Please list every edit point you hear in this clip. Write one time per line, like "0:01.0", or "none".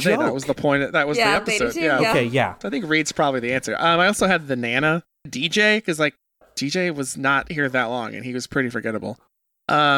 none